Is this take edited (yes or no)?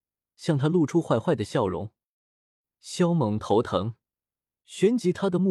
no